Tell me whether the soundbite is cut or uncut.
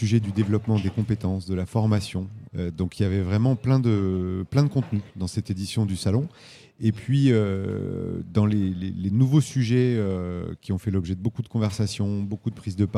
cut